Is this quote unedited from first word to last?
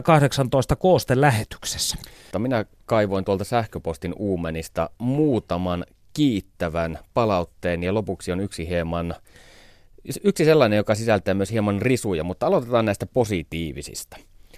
no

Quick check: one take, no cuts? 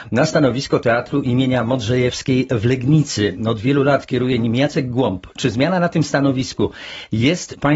yes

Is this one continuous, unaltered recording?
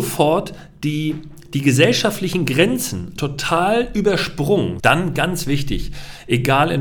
no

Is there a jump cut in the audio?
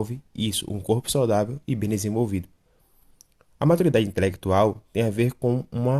no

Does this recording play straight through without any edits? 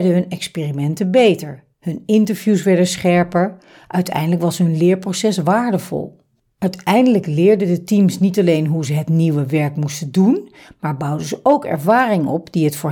yes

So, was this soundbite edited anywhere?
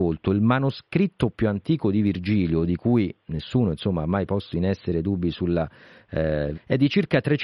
yes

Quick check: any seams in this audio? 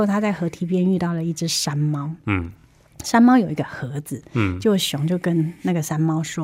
no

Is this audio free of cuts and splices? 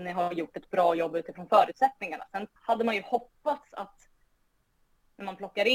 no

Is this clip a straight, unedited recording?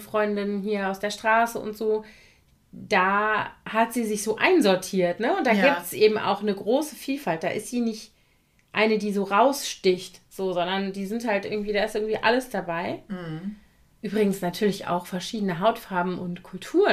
yes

